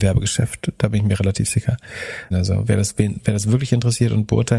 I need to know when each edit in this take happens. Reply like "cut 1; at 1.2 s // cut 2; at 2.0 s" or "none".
cut 1; at 2.3 s